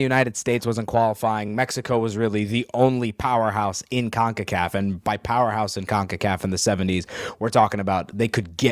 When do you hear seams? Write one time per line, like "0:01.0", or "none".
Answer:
none